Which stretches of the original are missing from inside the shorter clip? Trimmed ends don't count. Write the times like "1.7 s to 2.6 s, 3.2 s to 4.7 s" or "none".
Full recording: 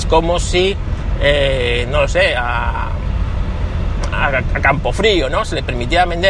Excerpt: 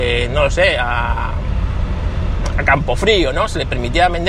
4.1 s to 4.5 s